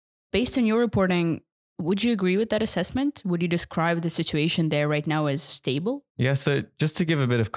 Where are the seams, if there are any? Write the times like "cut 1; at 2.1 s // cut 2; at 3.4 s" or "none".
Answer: cut 1; at 6.1 s